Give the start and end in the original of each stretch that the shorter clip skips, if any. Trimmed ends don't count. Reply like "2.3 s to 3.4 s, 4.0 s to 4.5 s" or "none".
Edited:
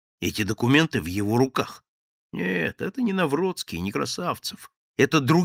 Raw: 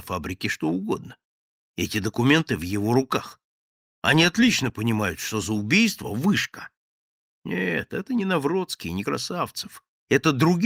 3.8 s to 7.3 s